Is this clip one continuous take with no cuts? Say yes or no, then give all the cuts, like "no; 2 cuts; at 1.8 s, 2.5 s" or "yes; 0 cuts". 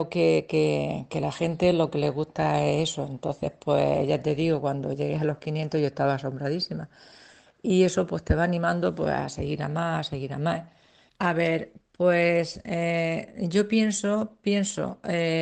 no; 1 cut; at 11.1 s